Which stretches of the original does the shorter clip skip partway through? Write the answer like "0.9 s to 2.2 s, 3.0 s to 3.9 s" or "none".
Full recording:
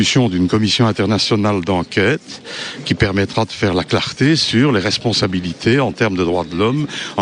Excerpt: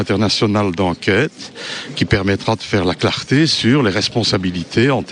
none